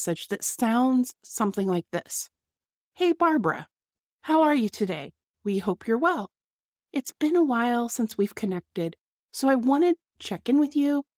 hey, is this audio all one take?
yes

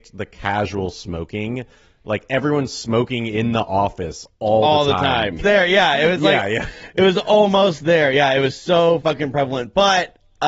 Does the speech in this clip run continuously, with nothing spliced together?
no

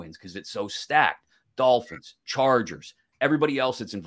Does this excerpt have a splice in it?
no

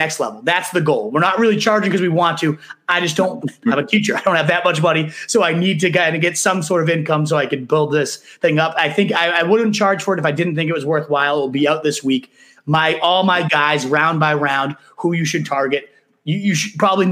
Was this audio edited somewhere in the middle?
no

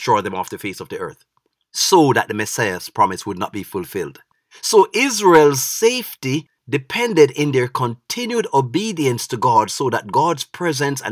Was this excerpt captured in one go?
no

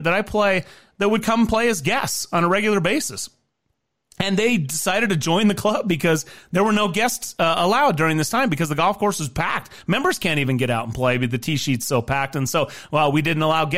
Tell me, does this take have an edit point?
no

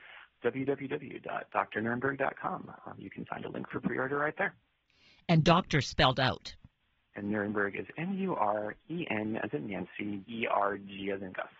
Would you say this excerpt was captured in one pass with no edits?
no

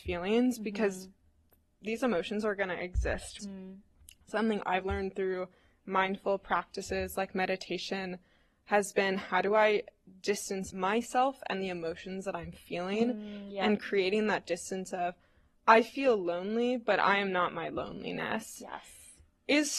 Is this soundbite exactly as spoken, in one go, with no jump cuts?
no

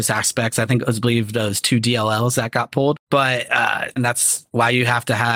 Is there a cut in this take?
yes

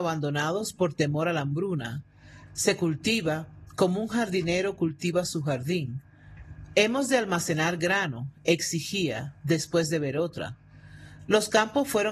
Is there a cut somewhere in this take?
yes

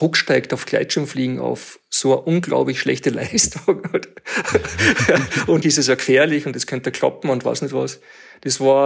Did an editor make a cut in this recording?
yes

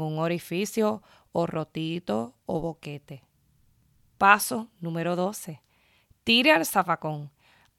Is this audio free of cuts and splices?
yes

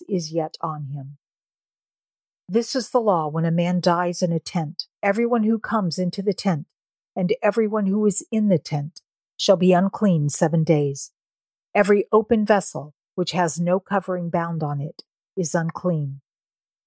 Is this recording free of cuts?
no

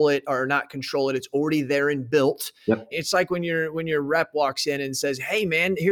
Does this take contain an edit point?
yes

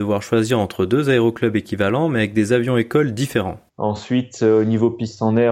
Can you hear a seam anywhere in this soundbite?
yes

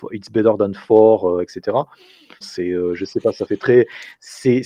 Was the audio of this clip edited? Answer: yes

